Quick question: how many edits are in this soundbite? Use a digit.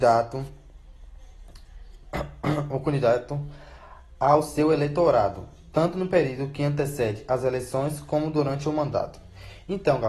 0